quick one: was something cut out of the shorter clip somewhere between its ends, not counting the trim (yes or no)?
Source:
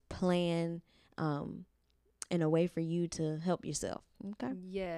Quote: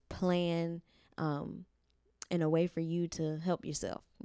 no